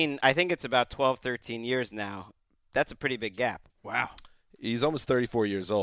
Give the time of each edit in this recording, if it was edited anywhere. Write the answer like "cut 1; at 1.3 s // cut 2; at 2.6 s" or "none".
none